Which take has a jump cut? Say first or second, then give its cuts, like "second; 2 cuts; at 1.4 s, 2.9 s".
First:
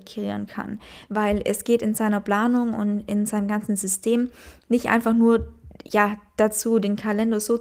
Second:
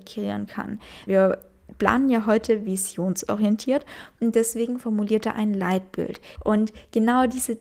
second; 2 cuts; at 1.1 s, 6.4 s